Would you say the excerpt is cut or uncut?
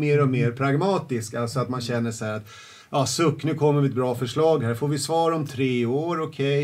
uncut